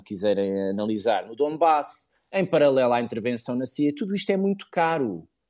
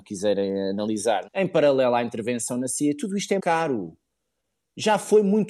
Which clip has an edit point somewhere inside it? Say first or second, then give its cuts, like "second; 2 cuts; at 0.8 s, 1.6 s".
second; 2 cuts; at 1.3 s, 3.4 s